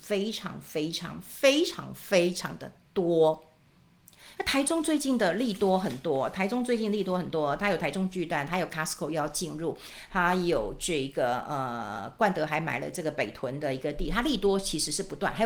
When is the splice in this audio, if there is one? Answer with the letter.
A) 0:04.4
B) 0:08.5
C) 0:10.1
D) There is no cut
A